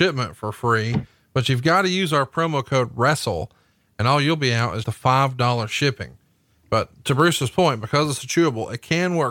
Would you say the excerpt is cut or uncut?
cut